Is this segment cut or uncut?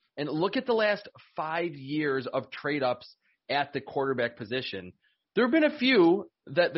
uncut